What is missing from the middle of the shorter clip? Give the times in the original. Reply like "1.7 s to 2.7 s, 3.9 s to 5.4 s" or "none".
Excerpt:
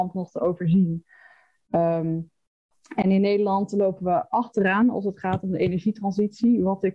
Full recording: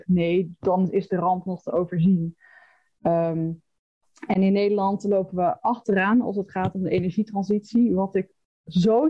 none